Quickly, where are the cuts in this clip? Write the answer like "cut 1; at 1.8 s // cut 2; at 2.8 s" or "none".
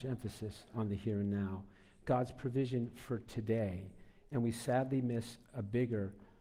none